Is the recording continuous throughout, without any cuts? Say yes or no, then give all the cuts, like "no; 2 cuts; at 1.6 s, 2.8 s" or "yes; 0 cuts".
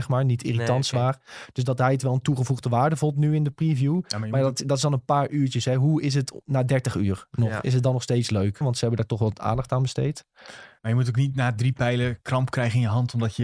no; 2 cuts; at 8.6 s, 10.8 s